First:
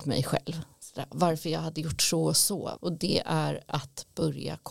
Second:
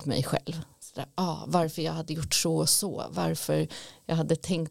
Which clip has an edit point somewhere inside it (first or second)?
first